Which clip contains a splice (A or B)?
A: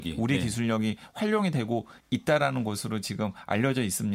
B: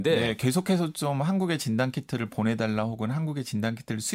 A